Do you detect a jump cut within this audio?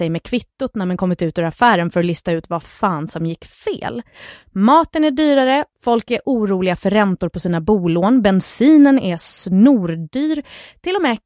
no; 0 cuts

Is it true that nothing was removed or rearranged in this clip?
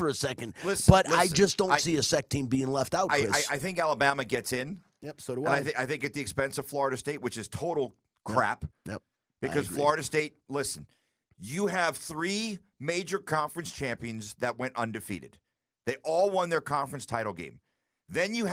yes; 0 cuts

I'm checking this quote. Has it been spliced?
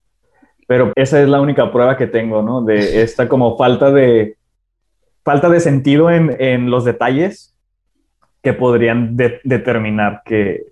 yes; 1 cut; at 0.9 s

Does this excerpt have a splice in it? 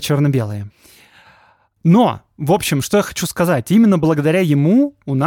no; 0 cuts

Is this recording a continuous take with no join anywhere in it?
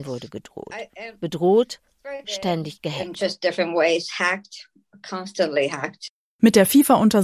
no; 1 cut; at 2.2 s

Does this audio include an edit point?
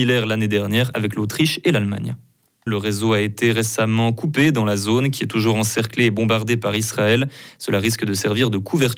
yes; 1 cut; at 2.7 s

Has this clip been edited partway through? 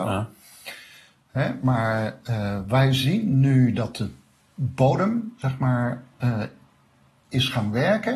no; 0 cuts

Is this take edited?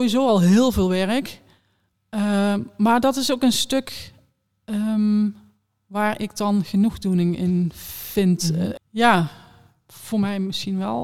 yes; 1 cut; at 8.8 s

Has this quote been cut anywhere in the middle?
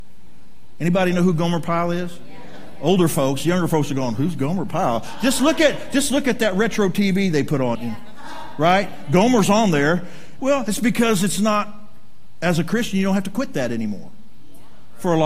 yes; 2 cuts; at 7.7 s, 10.4 s

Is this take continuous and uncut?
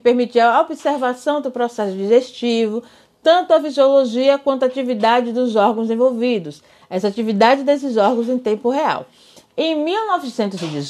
yes; 0 cuts

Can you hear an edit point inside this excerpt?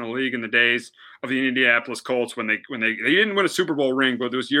no; 0 cuts

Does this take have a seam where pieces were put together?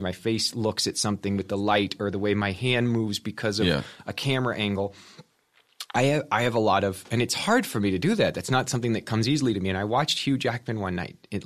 no; 0 cuts

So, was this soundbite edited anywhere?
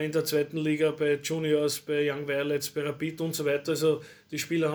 no; 0 cuts

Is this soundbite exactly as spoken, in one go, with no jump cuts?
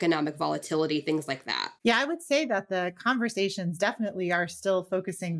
yes; 0 cuts

